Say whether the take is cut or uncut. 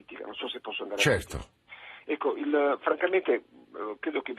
uncut